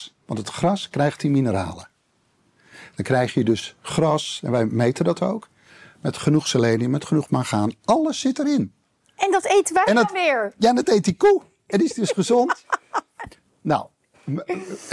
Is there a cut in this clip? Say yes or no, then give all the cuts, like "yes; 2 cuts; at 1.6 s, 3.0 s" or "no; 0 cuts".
no; 0 cuts